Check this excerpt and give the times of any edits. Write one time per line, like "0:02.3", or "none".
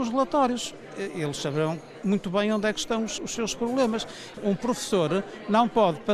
0:03.2
0:04.3